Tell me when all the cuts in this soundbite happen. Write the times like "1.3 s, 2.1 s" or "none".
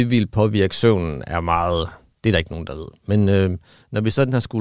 none